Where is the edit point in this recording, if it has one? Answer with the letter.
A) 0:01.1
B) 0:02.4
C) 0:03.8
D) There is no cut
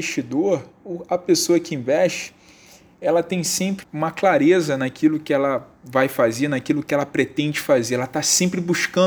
C